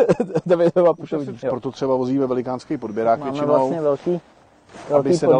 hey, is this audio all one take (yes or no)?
no